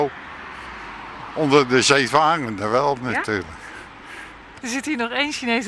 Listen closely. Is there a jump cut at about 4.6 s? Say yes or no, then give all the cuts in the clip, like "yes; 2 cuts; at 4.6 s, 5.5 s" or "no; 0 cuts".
yes; 1 cut; at 4.6 s